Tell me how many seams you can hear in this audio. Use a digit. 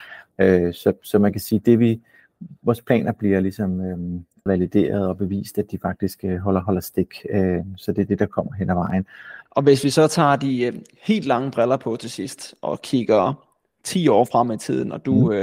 2